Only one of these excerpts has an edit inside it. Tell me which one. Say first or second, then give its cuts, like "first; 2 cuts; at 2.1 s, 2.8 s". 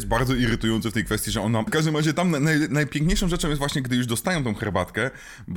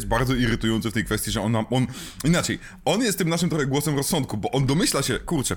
first; 1 cut; at 1.7 s